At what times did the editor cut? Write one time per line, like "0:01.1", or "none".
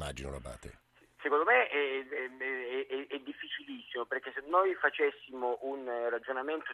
none